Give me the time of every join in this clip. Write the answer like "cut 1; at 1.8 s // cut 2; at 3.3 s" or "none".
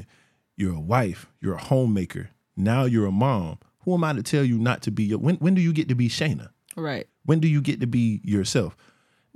cut 1; at 7.1 s